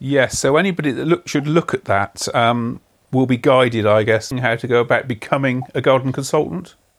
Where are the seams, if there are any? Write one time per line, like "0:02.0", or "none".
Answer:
0:04.3